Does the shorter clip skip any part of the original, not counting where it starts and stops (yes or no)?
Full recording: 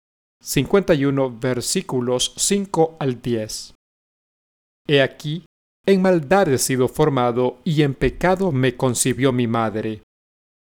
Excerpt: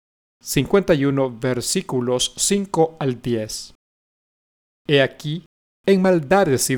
no